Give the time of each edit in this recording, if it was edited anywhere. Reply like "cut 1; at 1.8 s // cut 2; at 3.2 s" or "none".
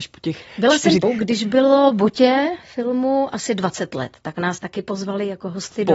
cut 1; at 1.0 s